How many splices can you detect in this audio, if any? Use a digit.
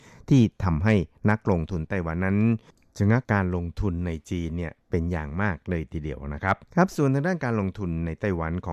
2